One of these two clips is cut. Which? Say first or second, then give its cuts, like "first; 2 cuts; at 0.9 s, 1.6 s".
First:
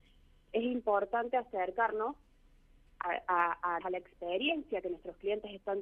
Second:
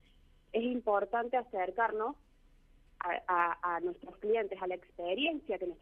first; 1 cut; at 3.8 s